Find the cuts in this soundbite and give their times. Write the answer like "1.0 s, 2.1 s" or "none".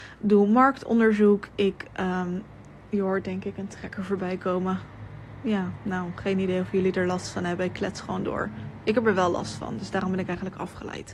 none